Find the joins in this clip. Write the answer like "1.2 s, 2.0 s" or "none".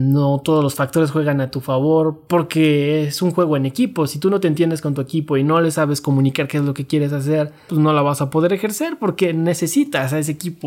7.7 s